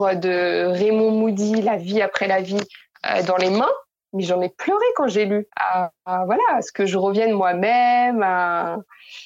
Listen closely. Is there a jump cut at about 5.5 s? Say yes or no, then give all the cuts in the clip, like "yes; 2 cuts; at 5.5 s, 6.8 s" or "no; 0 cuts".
yes; 1 cut; at 5.5 s